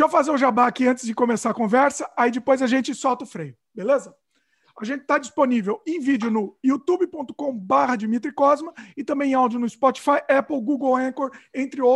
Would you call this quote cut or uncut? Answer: uncut